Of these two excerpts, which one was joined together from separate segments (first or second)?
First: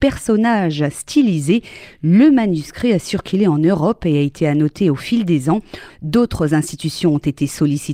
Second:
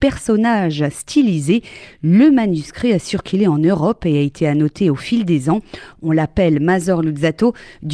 first